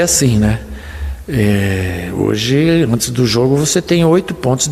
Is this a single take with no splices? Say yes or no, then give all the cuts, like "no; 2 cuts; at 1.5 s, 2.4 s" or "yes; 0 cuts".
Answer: yes; 0 cuts